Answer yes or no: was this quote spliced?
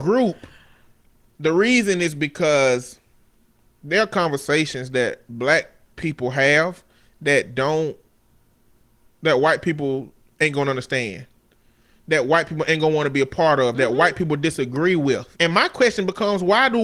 yes